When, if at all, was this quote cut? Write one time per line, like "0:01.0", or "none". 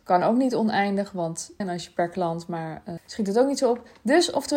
0:01.6
0:03.0